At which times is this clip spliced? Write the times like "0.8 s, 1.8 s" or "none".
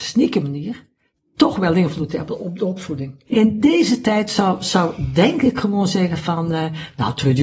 3.3 s